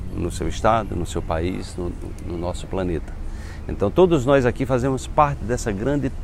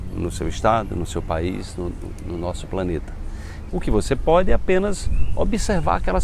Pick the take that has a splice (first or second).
second